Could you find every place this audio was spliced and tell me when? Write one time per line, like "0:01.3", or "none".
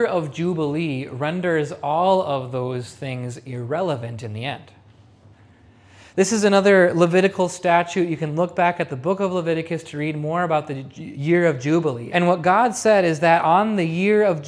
0:12.1